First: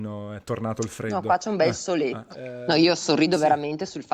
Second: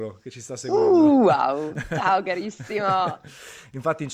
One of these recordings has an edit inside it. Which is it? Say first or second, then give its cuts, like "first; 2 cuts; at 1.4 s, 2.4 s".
first; 1 cut; at 2.3 s